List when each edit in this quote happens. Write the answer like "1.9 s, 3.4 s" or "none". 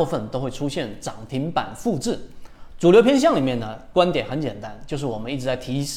2.7 s